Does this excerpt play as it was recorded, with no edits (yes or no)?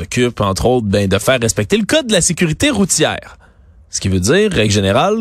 yes